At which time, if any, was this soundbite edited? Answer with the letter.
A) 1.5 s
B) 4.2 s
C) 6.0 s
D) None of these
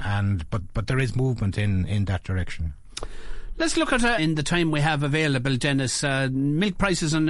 B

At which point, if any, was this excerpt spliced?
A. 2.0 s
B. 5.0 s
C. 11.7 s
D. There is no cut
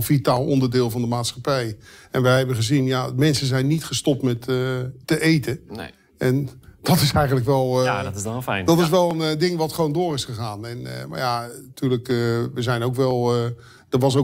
B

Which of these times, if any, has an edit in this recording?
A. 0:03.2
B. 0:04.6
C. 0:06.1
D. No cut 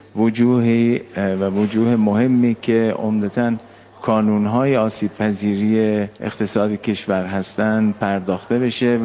C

